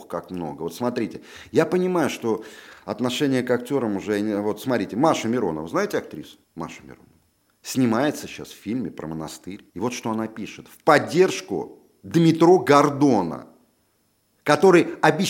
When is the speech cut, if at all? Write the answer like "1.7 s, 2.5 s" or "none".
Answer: 6.4 s, 9.7 s